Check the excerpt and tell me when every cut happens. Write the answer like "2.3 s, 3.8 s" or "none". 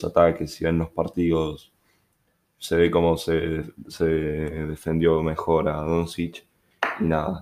none